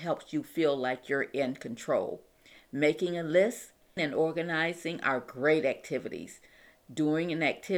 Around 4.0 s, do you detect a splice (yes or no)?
yes